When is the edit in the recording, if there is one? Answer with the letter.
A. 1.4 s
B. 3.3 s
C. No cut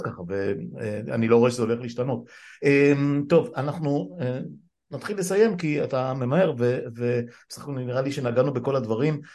C